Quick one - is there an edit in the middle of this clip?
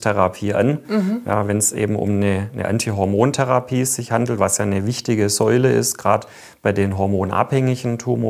no; 0 cuts

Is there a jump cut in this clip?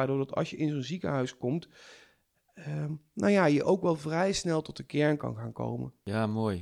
no; 0 cuts

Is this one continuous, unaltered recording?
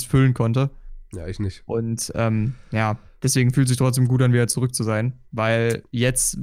yes; 0 cuts

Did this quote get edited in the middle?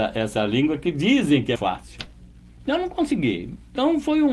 yes; 1 cut; at 1.6 s

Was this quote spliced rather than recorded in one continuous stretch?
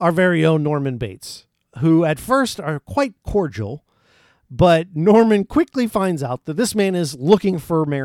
no; 0 cuts

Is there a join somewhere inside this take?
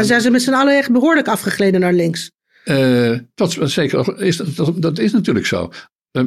no; 0 cuts

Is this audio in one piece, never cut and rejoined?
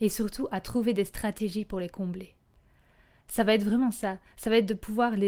yes; 0 cuts

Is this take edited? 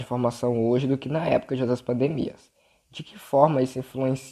no; 0 cuts

